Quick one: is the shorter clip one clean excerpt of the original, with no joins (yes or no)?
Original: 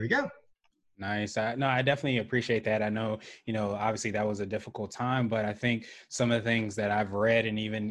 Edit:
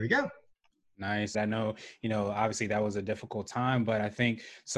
no